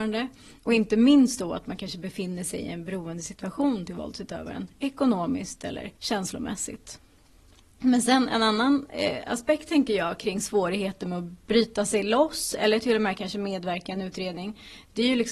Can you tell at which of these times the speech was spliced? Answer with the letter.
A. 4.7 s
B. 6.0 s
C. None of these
B